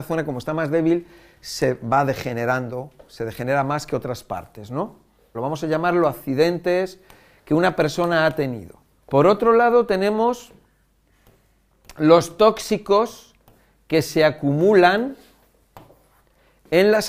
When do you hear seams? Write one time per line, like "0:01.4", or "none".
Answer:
0:05.3
0:09.0

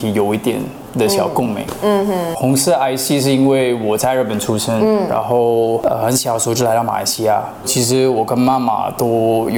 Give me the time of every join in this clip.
0:07.6

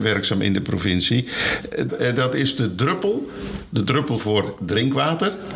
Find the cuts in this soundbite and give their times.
0:01.9

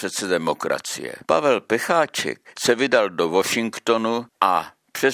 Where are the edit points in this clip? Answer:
0:01.2

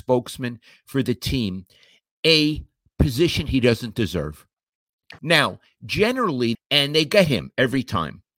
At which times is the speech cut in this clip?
0:05.2
0:06.5

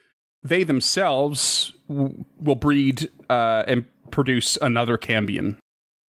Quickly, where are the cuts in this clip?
none

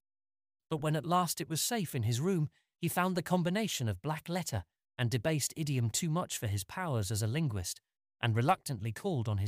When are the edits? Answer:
none

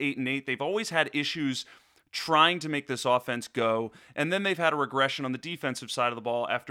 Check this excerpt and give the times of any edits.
none

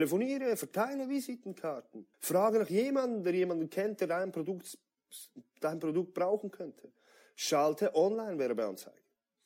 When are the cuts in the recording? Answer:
0:02.1

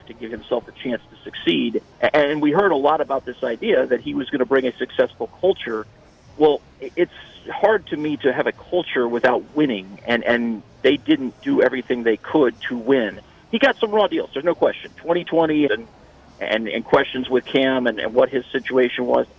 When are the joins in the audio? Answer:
0:01.9
0:15.7

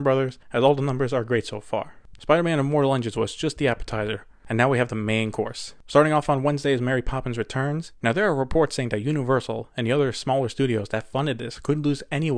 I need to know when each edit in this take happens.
0:02.2
0:07.9

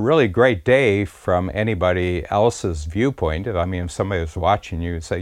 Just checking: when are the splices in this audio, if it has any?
none

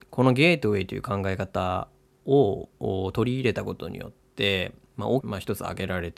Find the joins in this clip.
0:05.2

